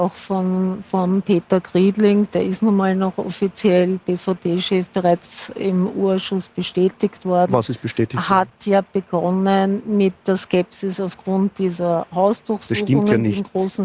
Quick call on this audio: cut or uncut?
uncut